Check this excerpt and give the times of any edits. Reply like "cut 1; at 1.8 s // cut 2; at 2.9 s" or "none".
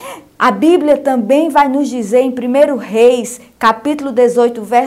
none

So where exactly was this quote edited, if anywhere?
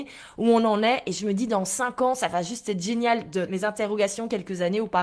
cut 1; at 3.5 s

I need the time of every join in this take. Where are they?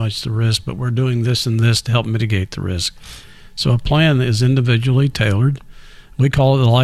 none

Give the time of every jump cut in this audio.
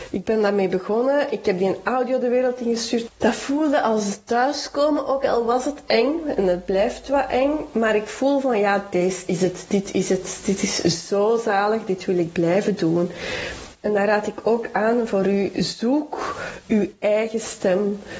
cut 1; at 3.1 s

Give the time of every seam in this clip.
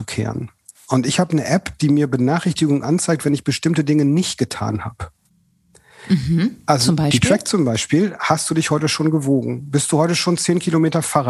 none

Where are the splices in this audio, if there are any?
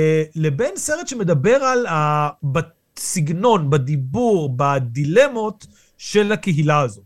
cut 1; at 2.4 s

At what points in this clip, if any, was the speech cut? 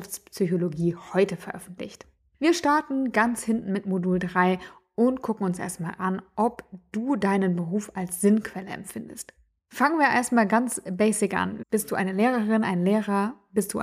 cut 1; at 11.6 s

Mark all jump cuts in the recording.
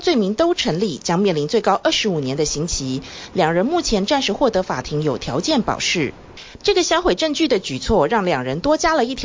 cut 1; at 6.6 s

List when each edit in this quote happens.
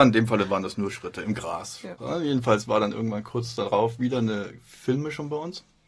cut 1; at 2.0 s

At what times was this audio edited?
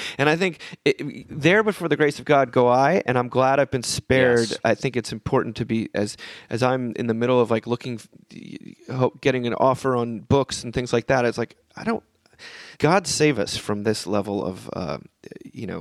cut 1; at 12.7 s

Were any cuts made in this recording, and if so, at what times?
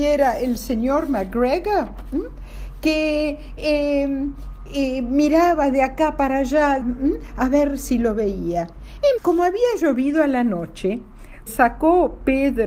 cut 1; at 6.8 s // cut 2; at 9.2 s // cut 3; at 11.5 s

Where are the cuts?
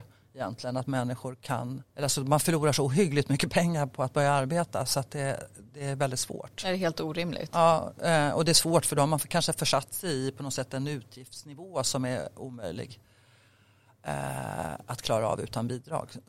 cut 1; at 1.9 s

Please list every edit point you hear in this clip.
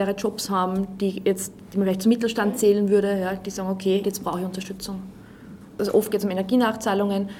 cut 1; at 4.0 s

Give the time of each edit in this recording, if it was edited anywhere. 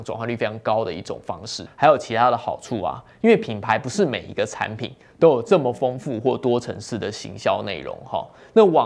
cut 1; at 1.7 s

